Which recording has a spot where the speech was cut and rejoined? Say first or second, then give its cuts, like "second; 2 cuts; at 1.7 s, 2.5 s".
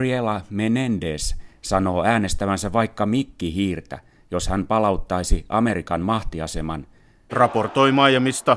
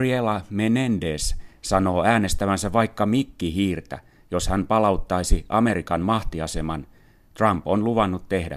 first; 1 cut; at 7.3 s